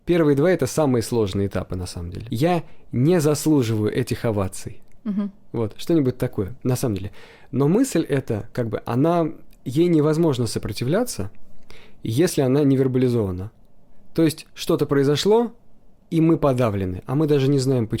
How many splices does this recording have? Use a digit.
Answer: 1